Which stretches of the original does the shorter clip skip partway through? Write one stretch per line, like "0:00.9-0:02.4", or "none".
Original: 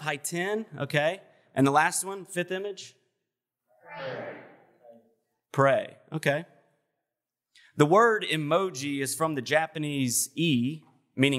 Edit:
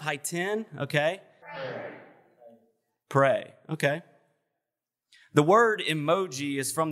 0:01.4-0:03.8